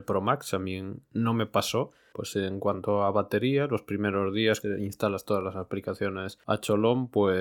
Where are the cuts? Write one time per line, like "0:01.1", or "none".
0:02.1
0:04.6